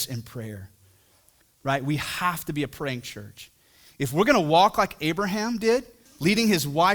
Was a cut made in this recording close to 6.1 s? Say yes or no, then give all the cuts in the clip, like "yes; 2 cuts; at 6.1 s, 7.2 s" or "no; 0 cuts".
yes; 1 cut; at 6.1 s